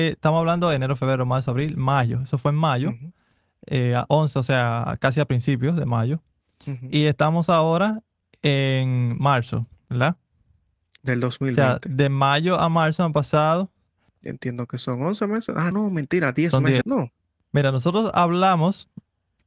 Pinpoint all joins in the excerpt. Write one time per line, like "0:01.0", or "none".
0:15.7
0:16.8